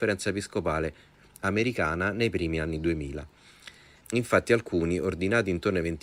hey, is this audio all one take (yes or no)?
no